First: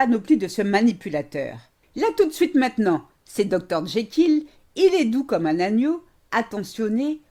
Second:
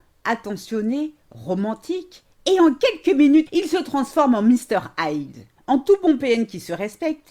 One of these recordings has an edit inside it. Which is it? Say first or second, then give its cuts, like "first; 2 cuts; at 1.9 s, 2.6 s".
second; 2 cuts; at 3.5 s, 5.6 s